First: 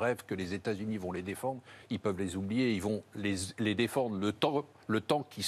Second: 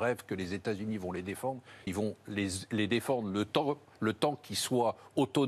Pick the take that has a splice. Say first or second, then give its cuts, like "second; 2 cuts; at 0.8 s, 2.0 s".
second; 1 cut; at 1.9 s